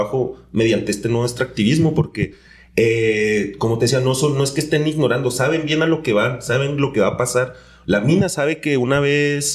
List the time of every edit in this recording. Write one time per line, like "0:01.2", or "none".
none